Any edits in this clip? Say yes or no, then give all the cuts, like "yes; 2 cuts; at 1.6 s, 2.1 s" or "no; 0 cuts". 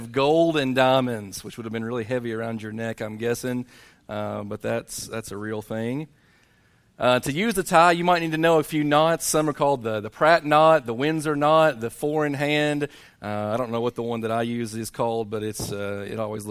no; 0 cuts